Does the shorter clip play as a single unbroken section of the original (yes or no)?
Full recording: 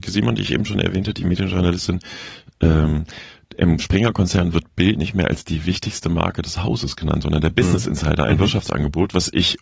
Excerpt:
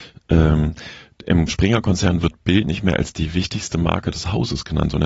yes